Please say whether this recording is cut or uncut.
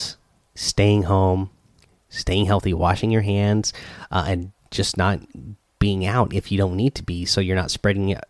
uncut